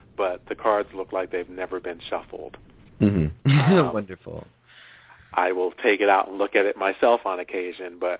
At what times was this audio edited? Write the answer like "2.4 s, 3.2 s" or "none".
3.4 s

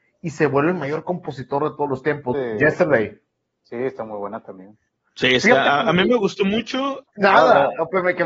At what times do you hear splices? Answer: 2.3 s, 7.0 s

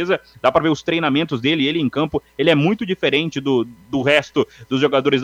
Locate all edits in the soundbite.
none

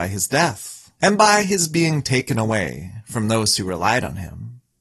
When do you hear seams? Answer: 1.0 s

